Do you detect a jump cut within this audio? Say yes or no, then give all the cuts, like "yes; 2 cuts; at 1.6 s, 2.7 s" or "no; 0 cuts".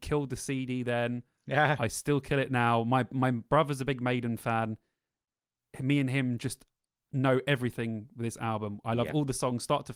no; 0 cuts